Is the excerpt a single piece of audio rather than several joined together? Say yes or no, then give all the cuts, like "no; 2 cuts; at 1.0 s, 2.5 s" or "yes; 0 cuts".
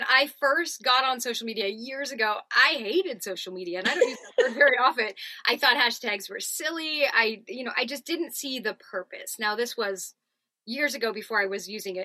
yes; 0 cuts